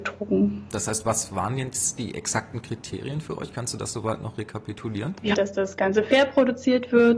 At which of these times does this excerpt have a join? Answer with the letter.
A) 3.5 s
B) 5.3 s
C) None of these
B